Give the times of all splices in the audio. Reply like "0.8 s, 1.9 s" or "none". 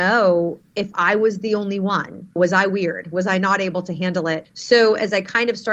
2.4 s, 4.4 s